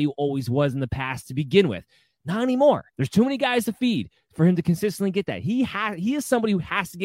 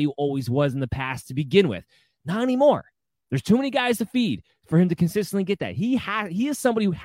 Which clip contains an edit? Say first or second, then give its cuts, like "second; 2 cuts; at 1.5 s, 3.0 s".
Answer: first; 1 cut; at 2.9 s